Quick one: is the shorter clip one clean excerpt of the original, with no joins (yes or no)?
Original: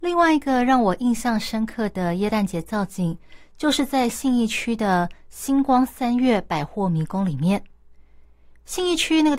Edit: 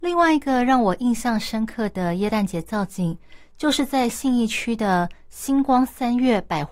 yes